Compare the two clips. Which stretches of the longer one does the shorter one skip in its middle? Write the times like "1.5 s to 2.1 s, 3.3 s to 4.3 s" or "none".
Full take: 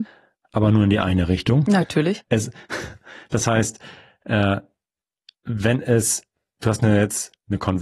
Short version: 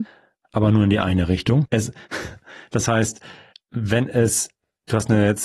1.6 s to 2.2 s, 4.1 s to 5.3 s